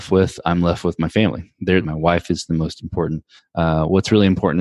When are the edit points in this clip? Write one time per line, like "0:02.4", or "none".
0:01.8
0:03.4